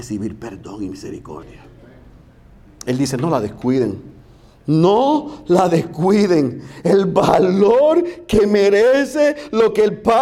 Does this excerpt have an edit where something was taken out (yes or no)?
no